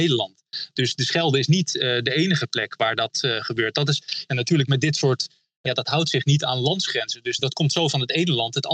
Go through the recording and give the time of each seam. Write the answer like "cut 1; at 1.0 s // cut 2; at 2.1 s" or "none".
cut 1; at 5.7 s // cut 2; at 7.4 s